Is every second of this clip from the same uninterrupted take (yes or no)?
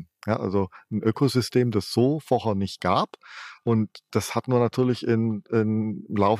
yes